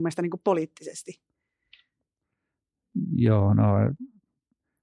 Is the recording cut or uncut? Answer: uncut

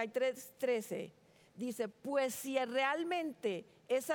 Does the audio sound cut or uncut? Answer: uncut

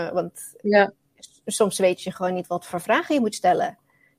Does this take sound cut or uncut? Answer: uncut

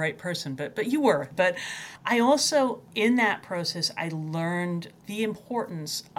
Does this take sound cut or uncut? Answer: cut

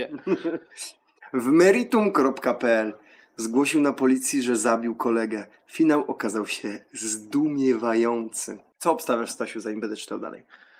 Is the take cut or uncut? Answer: uncut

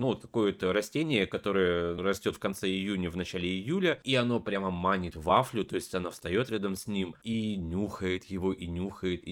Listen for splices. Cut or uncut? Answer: uncut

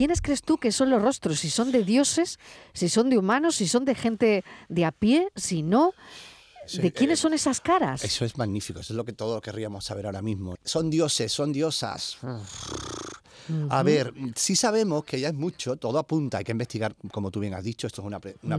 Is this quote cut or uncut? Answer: cut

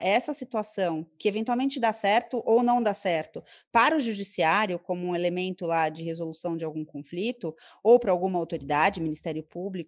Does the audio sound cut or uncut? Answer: uncut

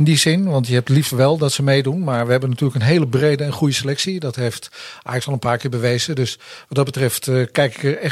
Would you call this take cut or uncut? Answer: uncut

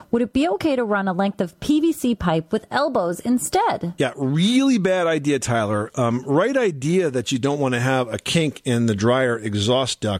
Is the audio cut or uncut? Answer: uncut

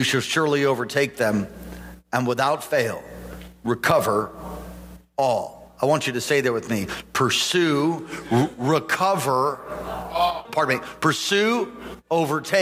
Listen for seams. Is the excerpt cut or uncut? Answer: cut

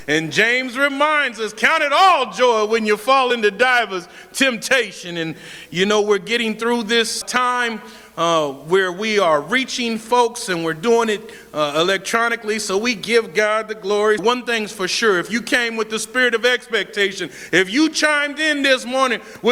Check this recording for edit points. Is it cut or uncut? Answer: cut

